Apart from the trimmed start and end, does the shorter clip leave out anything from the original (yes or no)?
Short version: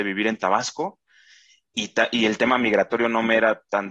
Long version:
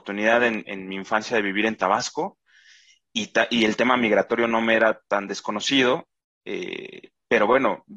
no